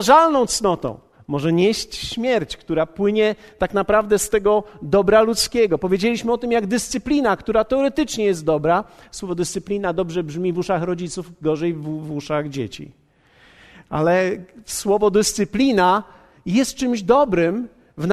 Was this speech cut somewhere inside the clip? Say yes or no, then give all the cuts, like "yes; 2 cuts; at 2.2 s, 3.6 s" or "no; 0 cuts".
no; 0 cuts